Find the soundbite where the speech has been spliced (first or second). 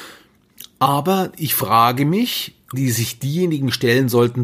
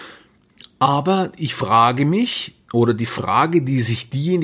first